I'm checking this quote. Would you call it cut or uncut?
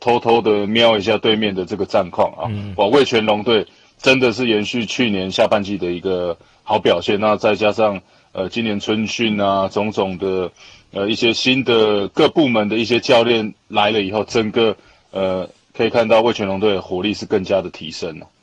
uncut